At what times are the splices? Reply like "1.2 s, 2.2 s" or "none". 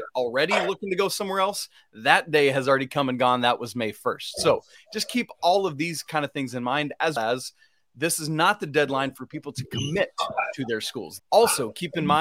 7.2 s, 11.2 s